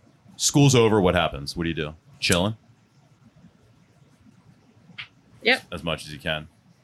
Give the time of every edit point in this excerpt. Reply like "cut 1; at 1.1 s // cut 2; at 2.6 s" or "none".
cut 1; at 2.1 s